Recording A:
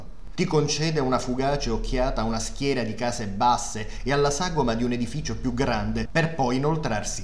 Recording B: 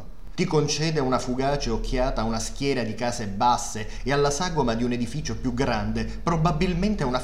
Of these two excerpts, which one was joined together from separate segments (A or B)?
A